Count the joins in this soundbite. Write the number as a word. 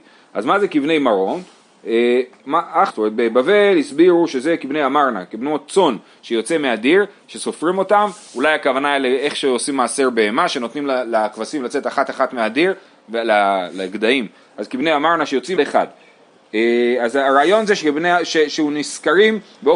three